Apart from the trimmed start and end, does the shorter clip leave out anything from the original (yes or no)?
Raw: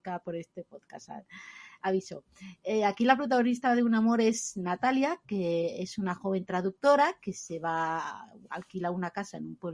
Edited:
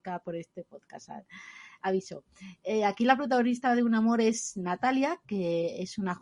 no